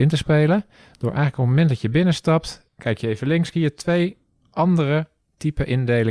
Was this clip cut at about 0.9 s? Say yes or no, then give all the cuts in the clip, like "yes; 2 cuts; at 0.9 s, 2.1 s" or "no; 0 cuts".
no; 1 cut; at 3.5 s